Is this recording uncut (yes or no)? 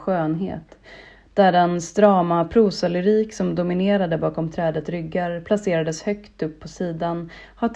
no